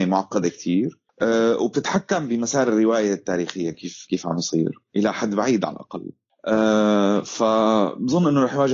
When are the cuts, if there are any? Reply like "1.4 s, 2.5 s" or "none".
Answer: none